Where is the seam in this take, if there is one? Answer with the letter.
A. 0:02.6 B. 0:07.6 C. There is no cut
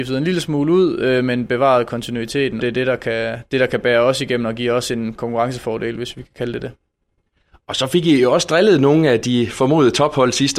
A